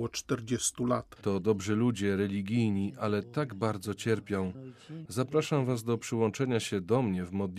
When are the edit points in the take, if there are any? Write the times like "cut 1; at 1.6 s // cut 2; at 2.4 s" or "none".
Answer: cut 1; at 1.2 s // cut 2; at 5.1 s